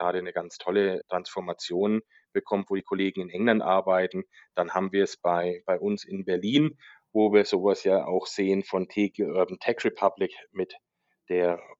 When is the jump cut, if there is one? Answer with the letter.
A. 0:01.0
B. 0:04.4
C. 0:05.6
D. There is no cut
A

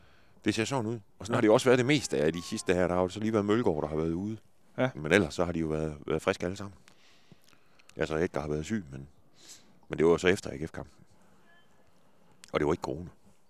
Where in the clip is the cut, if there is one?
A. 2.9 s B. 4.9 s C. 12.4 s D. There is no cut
B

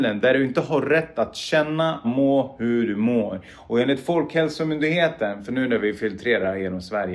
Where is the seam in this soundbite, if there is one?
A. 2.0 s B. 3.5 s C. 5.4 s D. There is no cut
A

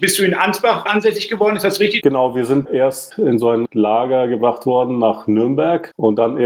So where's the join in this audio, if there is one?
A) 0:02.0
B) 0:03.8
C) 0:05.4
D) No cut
A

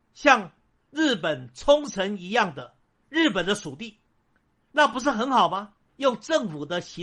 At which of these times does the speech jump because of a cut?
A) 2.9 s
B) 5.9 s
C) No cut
B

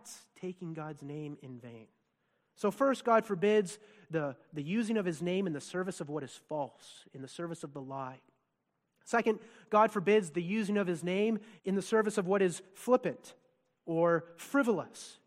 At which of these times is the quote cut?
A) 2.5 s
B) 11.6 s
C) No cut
B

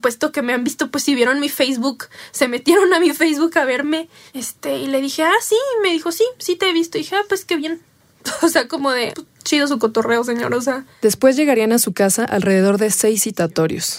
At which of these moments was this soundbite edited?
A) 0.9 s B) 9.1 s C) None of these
B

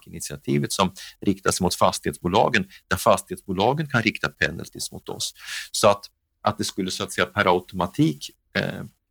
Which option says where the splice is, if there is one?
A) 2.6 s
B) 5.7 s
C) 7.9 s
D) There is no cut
D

